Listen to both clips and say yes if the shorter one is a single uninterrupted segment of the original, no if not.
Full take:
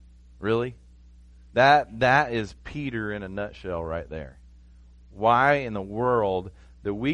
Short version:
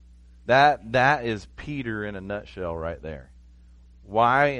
yes